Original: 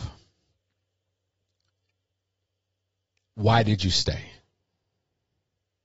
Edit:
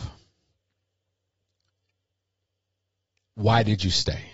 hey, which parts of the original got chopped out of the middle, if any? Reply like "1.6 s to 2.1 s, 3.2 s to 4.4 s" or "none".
none